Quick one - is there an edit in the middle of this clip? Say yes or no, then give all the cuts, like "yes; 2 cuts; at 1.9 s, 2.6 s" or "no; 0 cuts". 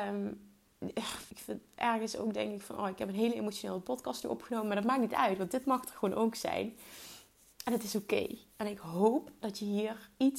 yes; 1 cut; at 1.3 s